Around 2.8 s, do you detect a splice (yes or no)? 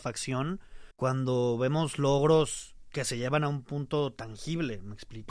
no